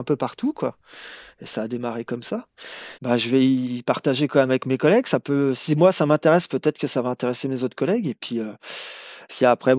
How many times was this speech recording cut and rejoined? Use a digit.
1